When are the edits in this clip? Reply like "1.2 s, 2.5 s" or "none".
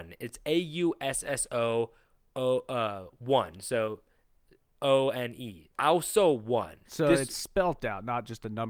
5.7 s, 6.8 s